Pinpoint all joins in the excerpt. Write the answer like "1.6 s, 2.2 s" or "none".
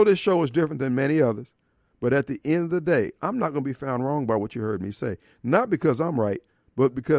none